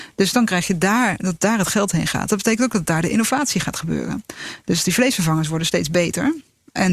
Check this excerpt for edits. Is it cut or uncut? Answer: uncut